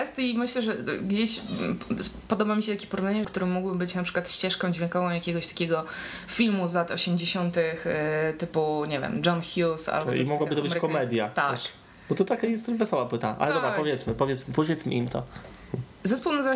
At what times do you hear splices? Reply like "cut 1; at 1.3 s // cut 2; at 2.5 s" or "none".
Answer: cut 1; at 3.2 s